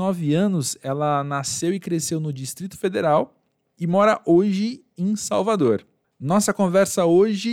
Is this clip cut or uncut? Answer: cut